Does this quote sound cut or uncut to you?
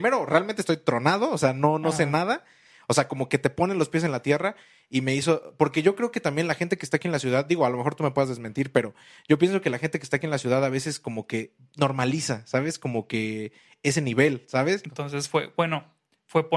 cut